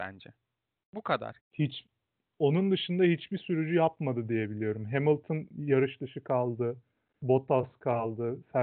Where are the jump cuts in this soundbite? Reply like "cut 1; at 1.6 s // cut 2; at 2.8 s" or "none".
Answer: cut 1; at 1.4 s